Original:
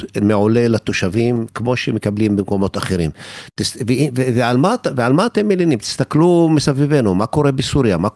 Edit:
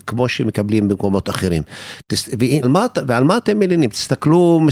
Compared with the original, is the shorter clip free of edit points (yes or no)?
no